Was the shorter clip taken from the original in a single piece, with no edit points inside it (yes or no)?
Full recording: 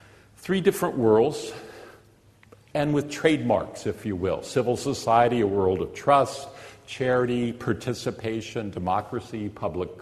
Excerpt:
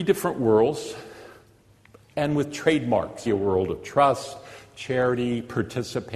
no